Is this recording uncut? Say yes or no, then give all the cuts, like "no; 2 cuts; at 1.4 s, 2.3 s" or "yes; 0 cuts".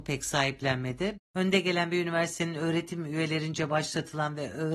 no; 1 cut; at 1.1 s